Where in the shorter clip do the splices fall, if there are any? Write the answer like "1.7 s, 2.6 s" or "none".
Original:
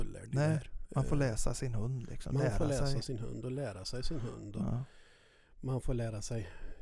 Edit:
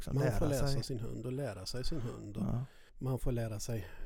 2.9 s